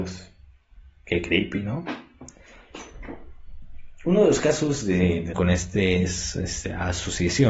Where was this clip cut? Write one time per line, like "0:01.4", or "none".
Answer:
0:05.3